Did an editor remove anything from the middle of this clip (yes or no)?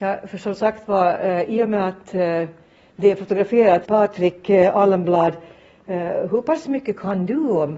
yes